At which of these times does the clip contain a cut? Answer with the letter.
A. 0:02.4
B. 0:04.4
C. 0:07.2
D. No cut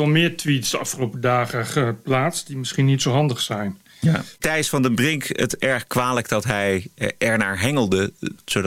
B